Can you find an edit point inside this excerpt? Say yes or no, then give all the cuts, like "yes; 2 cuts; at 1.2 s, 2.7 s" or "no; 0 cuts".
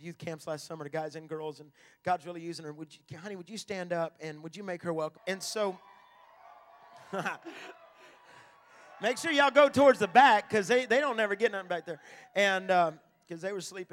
yes; 1 cut; at 5.2 s